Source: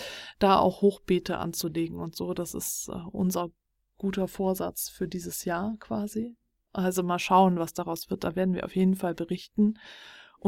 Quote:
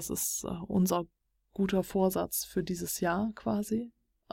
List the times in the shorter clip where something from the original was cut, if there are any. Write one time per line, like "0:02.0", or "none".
none